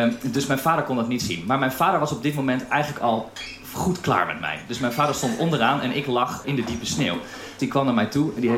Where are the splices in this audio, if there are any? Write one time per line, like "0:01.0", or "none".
0:06.4
0:07.6